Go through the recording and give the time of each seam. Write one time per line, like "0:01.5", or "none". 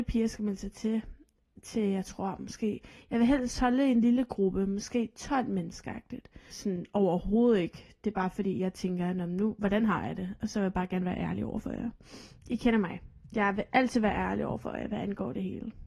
0:06.5